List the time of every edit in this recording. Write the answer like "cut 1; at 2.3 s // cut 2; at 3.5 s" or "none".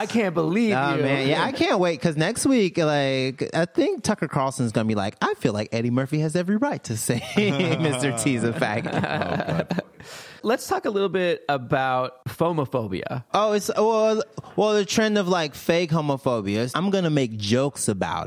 cut 1; at 13.3 s // cut 2; at 16.7 s